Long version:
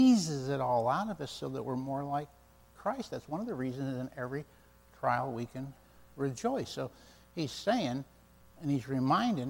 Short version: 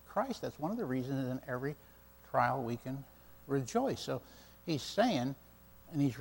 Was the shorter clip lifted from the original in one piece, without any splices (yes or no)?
yes